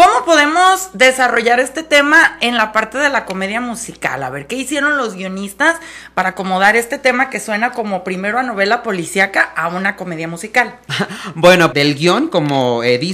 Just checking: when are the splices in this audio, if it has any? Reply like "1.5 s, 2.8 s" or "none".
11.7 s